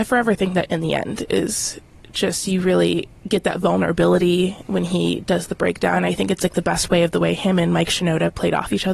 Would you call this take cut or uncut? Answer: uncut